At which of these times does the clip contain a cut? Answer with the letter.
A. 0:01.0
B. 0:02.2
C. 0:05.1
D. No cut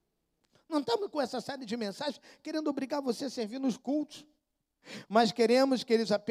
D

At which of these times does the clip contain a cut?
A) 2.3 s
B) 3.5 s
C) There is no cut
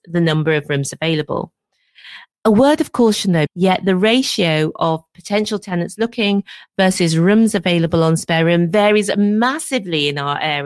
B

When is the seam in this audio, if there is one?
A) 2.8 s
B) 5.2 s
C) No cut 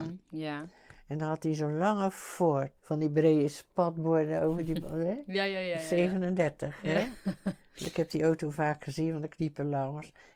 A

